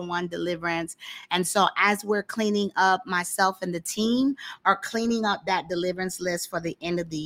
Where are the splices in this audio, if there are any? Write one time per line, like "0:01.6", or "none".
none